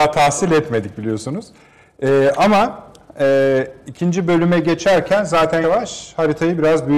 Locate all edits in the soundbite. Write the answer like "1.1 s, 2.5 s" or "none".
5.6 s